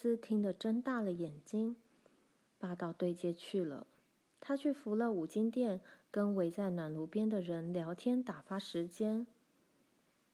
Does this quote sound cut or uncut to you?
cut